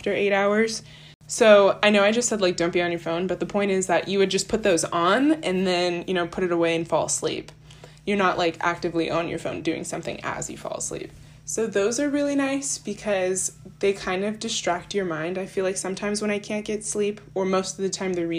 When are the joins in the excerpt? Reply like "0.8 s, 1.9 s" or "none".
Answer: none